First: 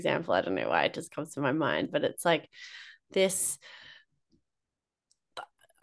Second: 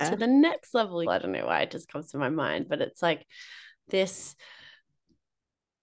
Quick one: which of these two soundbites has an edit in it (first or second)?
second